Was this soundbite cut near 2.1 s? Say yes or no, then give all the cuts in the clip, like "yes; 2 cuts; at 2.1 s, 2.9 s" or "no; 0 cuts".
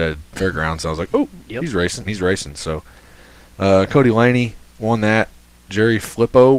yes; 1 cut; at 2.1 s